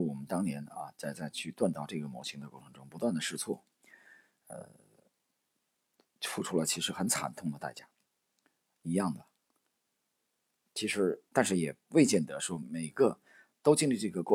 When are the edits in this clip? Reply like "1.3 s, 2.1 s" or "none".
11.3 s